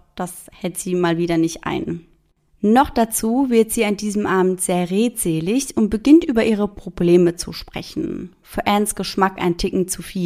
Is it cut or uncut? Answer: uncut